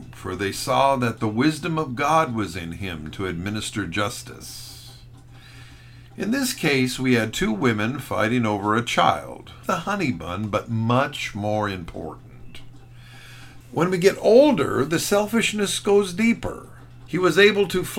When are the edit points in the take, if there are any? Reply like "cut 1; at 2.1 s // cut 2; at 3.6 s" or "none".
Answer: cut 1; at 9.6 s // cut 2; at 13.6 s // cut 3; at 17.1 s